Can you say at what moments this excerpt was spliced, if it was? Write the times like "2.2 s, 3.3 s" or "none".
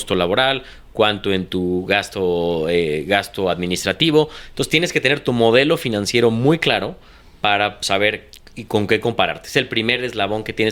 none